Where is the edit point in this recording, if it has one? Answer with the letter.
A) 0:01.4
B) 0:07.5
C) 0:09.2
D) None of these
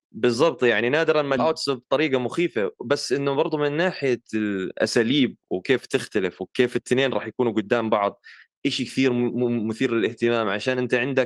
A